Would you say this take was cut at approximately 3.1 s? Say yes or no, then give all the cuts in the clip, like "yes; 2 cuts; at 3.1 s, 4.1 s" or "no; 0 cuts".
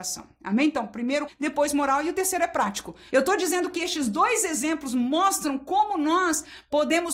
yes; 2 cuts; at 1.3 s, 3.1 s